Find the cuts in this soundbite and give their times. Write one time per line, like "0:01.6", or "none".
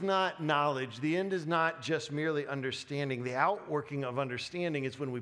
none